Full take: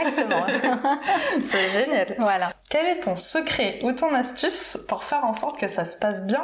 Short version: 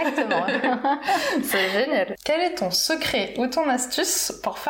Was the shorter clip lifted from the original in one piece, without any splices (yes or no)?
no